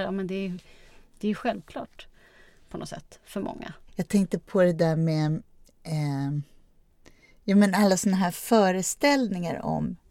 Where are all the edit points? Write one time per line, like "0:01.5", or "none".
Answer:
0:03.9